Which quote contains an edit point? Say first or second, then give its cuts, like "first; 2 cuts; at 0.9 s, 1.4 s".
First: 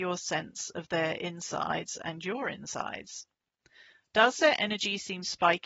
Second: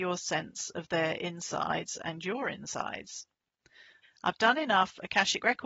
second; 1 cut; at 4.0 s